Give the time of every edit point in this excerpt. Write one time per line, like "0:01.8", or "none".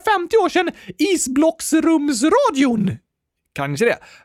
none